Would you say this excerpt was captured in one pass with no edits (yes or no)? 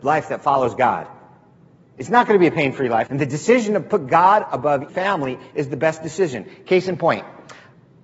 no